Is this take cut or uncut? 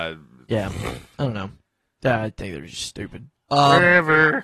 uncut